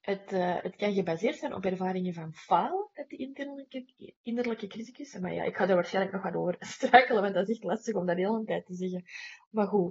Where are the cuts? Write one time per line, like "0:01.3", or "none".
none